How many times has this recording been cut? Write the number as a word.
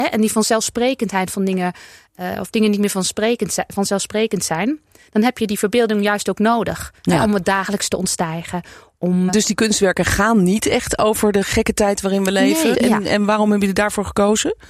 two